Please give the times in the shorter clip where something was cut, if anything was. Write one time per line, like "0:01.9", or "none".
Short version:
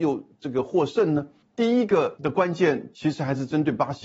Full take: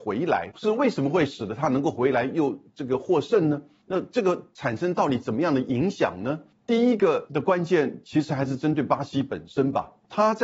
0:01.4